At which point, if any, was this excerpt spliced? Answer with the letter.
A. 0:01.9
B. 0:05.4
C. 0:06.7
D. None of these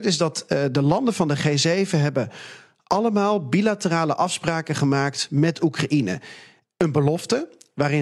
D